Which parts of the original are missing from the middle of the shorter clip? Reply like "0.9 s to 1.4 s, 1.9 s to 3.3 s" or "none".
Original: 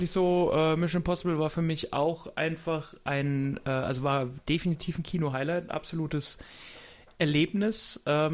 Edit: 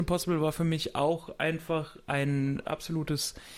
3.6 s to 5.7 s

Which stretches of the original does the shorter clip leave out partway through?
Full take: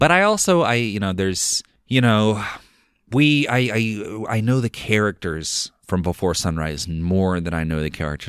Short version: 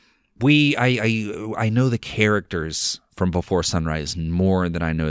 none

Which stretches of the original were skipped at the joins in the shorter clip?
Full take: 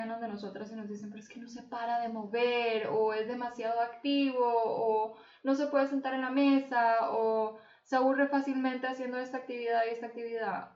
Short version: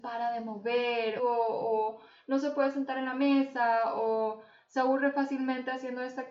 2.9 s to 4.3 s

